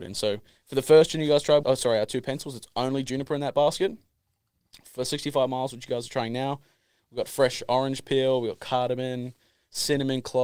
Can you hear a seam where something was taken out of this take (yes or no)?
yes